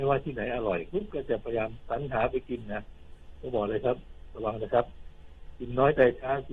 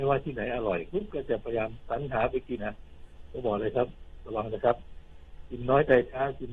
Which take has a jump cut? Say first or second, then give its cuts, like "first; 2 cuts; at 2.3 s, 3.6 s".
second; 1 cut; at 2.6 s